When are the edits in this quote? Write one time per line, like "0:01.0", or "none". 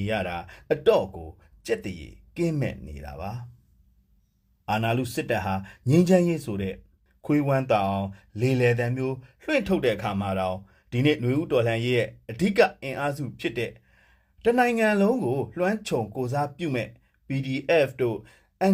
none